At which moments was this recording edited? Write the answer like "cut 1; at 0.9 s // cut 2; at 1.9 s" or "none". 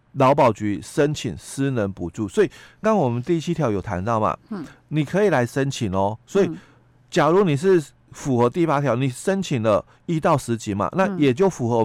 cut 1; at 2.8 s